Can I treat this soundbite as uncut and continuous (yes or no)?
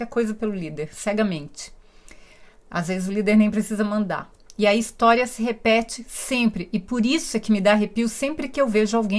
yes